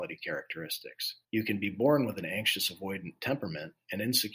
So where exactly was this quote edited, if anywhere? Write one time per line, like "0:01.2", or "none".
0:01.2